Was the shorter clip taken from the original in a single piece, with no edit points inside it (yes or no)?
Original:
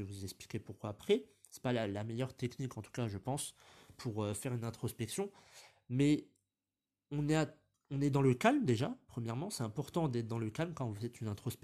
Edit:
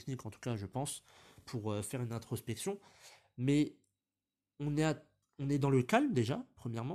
yes